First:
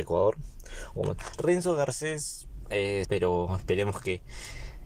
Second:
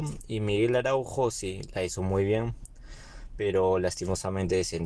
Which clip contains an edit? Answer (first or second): first